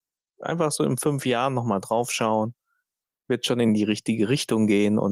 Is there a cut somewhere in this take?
no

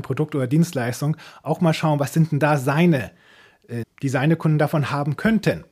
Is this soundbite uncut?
no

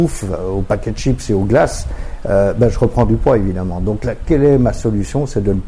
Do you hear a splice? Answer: no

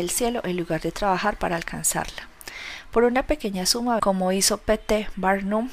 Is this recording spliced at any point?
yes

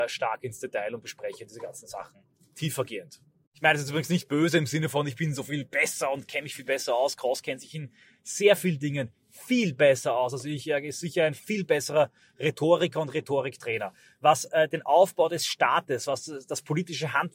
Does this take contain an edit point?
no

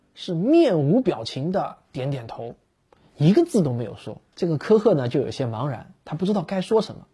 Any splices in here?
yes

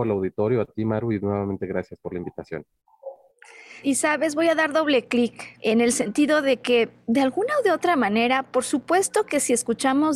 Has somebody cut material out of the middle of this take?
yes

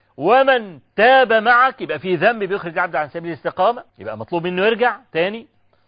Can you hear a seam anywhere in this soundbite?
yes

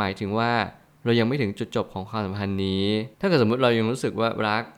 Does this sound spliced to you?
yes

